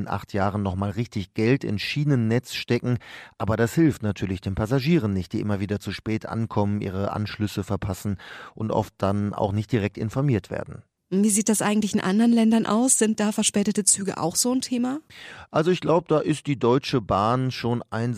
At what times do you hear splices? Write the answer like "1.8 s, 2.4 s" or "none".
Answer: none